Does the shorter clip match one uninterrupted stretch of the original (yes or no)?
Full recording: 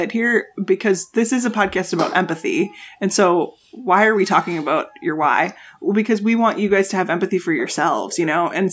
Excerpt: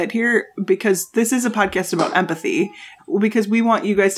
no